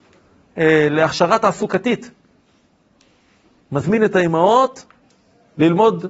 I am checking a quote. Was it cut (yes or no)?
no